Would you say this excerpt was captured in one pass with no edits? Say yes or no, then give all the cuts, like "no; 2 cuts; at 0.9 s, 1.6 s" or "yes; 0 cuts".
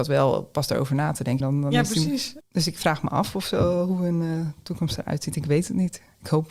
no; 1 cut; at 1.4 s